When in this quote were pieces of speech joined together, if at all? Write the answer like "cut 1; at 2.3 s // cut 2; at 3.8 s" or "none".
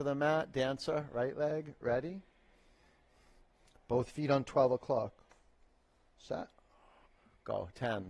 none